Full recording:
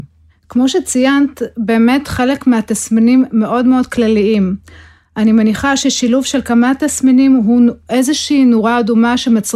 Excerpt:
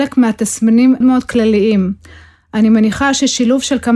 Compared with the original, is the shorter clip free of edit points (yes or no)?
no